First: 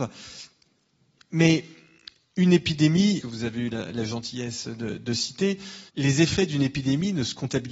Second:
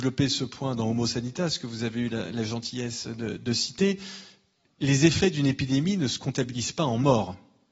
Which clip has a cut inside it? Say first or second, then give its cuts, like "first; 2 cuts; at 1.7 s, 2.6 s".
first; 2 cuts; at 3.2 s, 5.9 s